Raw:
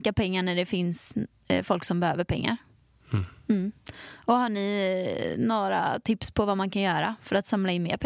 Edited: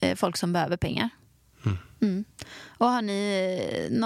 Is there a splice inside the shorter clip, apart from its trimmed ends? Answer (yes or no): no